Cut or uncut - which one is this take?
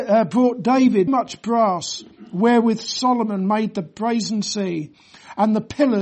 cut